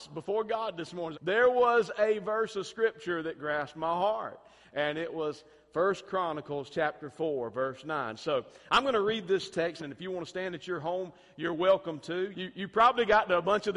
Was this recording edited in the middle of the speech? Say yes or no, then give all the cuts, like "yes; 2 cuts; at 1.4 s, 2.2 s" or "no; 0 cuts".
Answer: yes; 3 cuts; at 1.1 s, 9.8 s, 12.3 s